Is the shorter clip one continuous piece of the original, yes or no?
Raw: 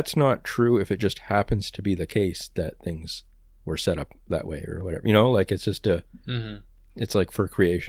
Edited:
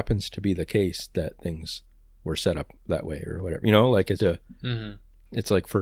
no